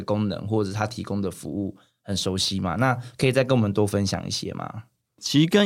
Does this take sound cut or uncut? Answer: uncut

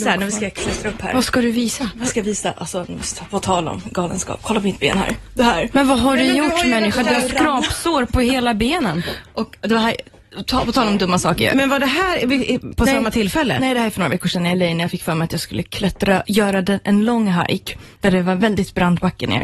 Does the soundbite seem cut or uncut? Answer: uncut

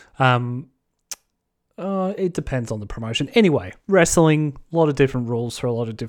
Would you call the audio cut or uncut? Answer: cut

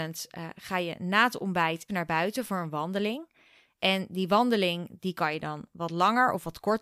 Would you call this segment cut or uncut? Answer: cut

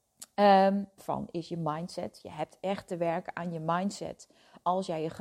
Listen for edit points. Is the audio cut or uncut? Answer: cut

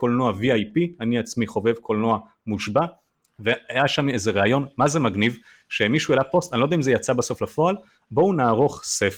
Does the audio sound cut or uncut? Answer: cut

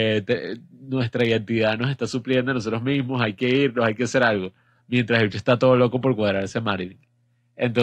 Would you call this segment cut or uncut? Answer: uncut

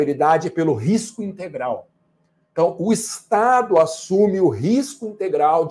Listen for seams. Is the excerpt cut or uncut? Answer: uncut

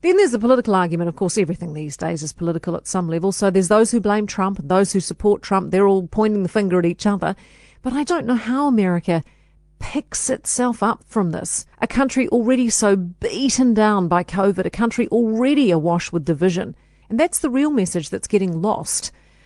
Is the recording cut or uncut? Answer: cut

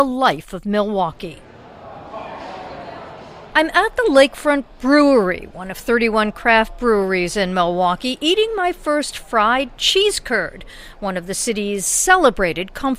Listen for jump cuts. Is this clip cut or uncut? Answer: uncut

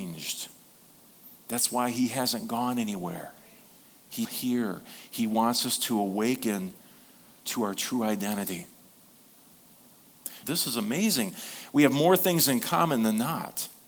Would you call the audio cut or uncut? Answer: cut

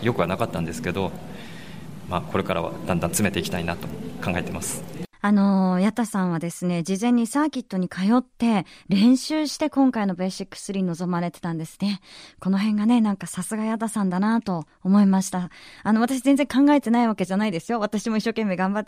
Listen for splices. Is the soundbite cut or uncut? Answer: cut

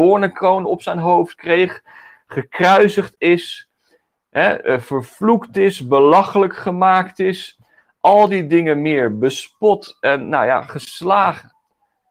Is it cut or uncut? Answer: uncut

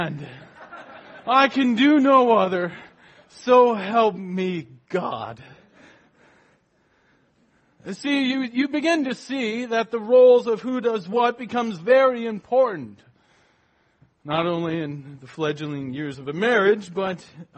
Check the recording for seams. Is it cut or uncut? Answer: uncut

